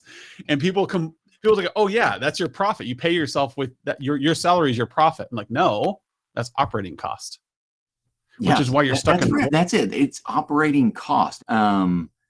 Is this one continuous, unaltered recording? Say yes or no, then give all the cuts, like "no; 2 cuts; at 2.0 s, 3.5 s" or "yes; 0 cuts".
no; 2 cuts; at 9.5 s, 11.4 s